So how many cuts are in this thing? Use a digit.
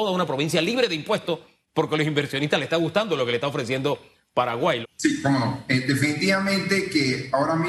1